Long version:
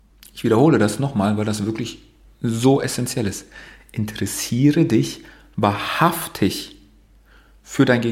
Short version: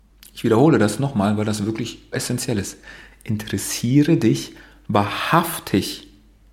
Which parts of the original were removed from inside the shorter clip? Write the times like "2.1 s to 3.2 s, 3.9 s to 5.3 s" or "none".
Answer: 2.1 s to 2.8 s